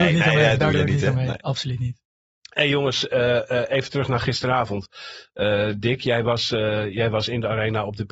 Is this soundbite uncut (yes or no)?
yes